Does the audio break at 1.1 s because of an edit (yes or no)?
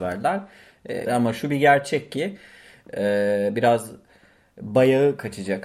yes